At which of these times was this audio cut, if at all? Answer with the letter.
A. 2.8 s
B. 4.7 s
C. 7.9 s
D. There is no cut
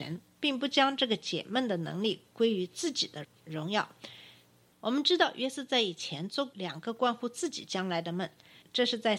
B